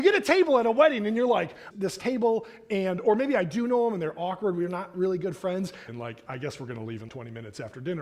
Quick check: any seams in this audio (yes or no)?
yes